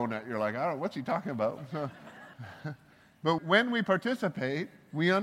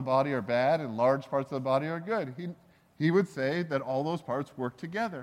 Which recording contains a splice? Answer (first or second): first